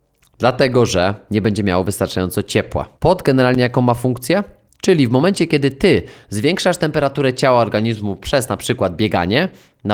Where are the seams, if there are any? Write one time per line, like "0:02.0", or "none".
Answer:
0:03.0
0:04.7